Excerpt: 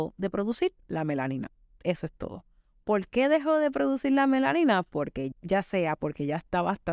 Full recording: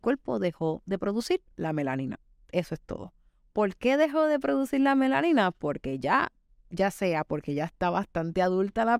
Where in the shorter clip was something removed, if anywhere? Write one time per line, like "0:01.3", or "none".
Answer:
0:05.3